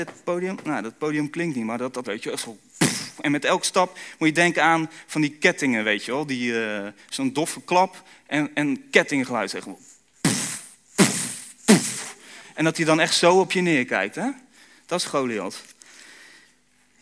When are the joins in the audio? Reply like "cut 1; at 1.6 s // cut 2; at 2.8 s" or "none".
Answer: cut 1; at 2.0 s